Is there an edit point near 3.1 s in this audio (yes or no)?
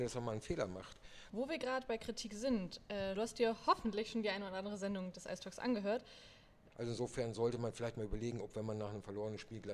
yes